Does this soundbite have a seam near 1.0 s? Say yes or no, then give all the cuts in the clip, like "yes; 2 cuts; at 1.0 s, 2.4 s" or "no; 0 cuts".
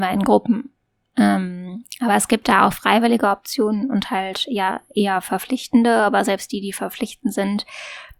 no; 0 cuts